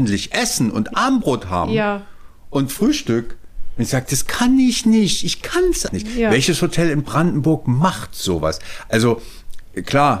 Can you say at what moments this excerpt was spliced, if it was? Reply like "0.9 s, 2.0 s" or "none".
5.9 s